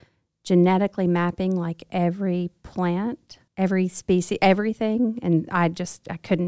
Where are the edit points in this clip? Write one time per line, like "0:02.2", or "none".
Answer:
0:03.5